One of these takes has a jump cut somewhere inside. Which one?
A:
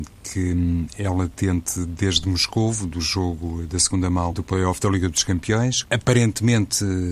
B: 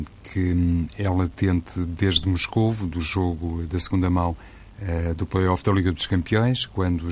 A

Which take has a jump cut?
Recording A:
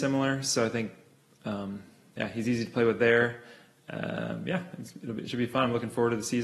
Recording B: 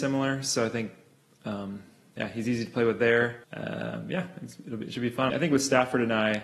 B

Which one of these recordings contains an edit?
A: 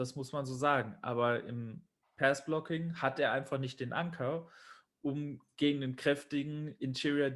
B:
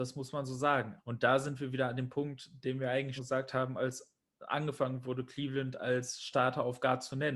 B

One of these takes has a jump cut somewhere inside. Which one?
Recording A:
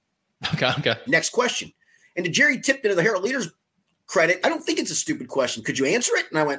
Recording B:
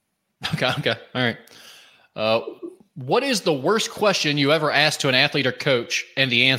A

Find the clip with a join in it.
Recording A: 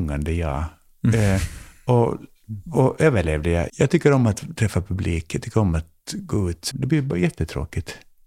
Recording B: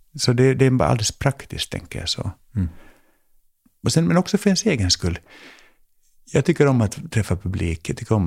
A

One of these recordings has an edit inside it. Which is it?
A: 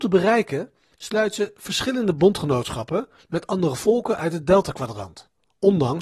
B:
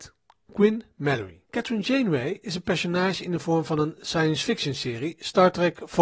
B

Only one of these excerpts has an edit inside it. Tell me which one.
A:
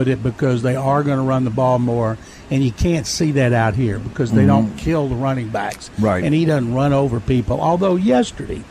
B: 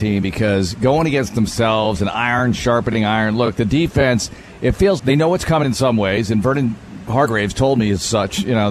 B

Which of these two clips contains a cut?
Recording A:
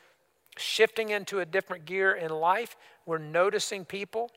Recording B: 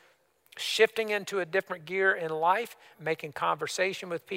B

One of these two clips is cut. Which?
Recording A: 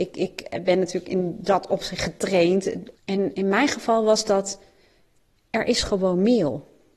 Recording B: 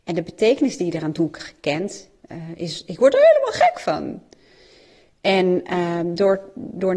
A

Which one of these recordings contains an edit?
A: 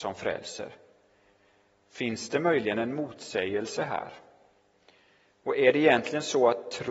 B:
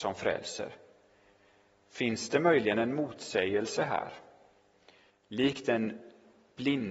B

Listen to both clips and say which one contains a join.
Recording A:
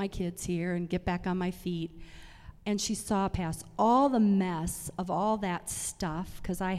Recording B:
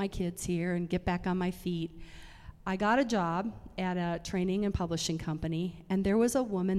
A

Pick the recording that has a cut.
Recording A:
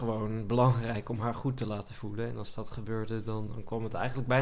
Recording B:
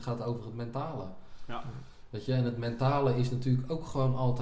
A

